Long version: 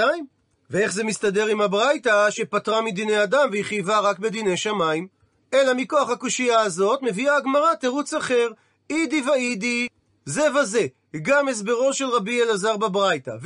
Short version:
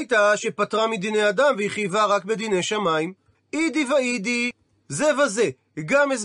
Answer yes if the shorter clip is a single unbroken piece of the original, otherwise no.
no